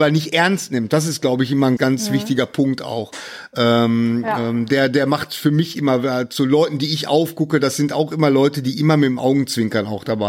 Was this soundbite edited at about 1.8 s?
yes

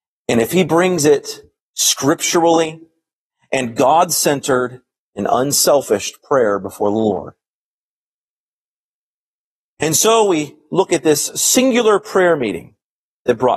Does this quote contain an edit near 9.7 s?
no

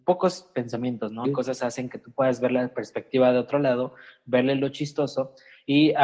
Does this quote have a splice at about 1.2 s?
yes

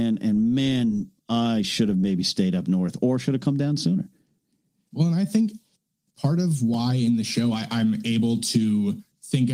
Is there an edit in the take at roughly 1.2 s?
no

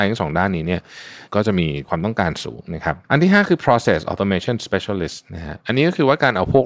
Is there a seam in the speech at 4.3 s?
no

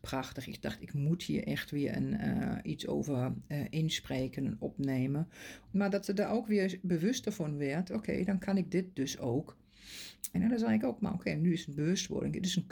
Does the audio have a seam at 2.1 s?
no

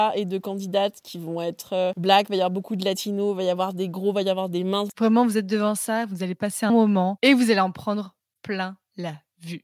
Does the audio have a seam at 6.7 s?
yes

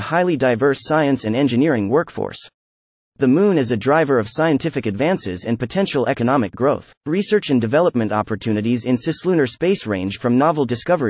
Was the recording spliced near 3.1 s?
no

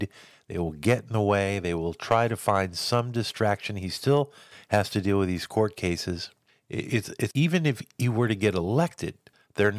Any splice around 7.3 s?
yes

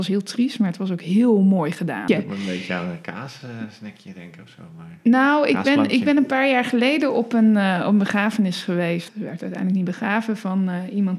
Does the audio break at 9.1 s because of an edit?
yes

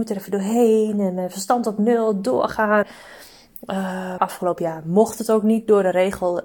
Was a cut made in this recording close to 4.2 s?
yes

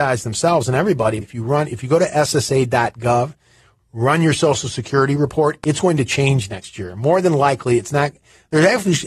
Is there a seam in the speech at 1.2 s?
yes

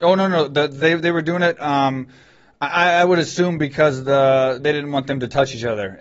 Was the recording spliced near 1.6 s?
no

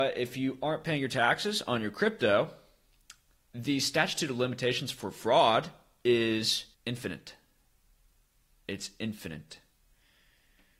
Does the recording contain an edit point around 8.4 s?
no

